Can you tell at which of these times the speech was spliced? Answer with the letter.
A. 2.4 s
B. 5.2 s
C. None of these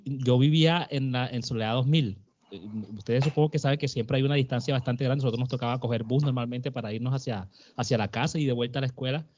C